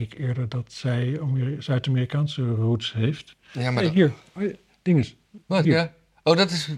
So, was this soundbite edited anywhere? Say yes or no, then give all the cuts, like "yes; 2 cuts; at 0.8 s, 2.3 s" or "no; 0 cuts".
yes; 1 cut; at 5.6 s